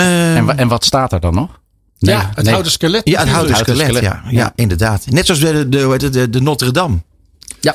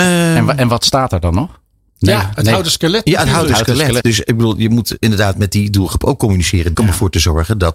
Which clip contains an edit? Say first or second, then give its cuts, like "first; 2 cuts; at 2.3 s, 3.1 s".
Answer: second; 2 cuts; at 4.0 s, 6.7 s